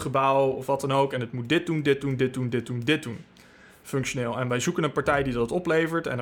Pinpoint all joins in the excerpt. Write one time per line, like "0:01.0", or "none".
none